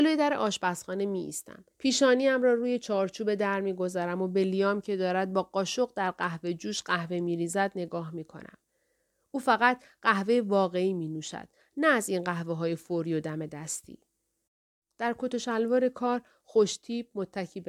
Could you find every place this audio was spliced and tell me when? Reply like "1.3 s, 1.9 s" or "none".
1.7 s